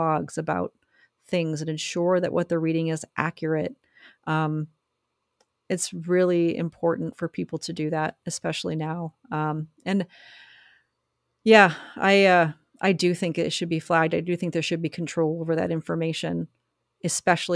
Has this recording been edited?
no; 0 cuts

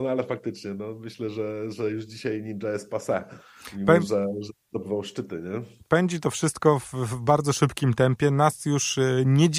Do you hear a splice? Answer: no; 0 cuts

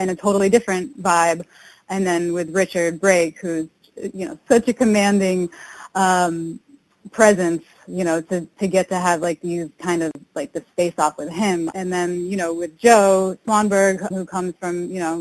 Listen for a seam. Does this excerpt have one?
yes; 3 cuts; at 4.5 s, 11.7 s, 14.1 s

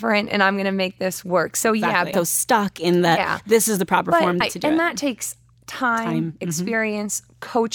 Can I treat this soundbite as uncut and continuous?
no; 2 cuts; at 2.1 s, 4.4 s

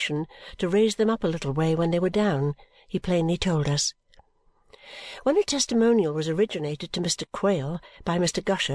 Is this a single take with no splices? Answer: yes; 0 cuts

